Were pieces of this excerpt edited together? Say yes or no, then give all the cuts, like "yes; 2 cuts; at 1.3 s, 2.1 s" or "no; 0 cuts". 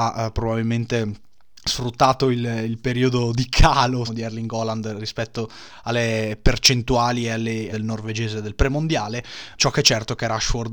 yes; 3 cuts; at 4.1 s, 7.7 s, 9.6 s